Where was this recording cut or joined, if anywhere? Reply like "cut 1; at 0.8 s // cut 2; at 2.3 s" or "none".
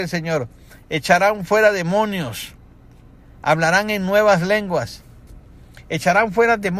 none